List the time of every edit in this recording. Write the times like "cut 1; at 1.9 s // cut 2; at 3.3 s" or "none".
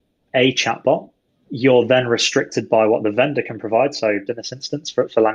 cut 1; at 4.3 s